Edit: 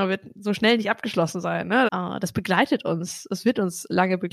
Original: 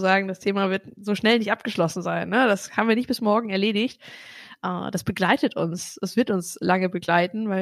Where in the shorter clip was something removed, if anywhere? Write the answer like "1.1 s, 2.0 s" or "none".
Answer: 1.9 s